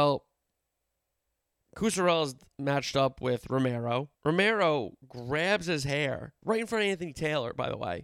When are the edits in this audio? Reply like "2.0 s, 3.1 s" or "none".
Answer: 4.1 s, 6.4 s